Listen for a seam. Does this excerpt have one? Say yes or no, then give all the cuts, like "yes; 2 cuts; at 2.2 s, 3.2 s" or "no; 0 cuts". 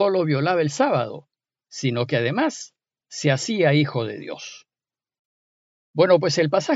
no; 0 cuts